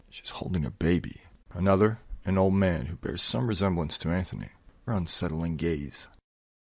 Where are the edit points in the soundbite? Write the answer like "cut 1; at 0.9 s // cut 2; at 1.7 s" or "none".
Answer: cut 1; at 1.4 s // cut 2; at 4.9 s